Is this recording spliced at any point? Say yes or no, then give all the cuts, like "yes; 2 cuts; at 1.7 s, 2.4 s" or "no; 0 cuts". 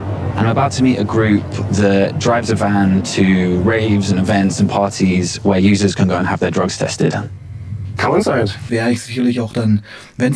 yes; 1 cut; at 8.7 s